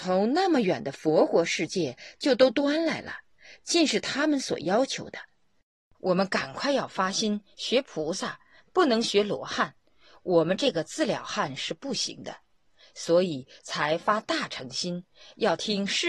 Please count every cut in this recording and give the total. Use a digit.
1